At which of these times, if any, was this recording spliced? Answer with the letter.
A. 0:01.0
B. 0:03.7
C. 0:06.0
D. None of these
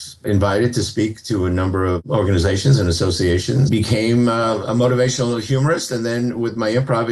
B